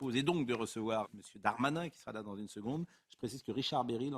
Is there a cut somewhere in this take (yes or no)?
yes